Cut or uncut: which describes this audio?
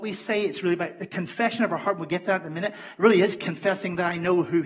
uncut